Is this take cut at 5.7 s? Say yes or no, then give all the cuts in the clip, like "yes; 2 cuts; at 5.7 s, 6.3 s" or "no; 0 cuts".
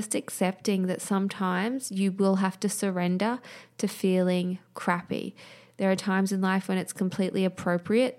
no; 0 cuts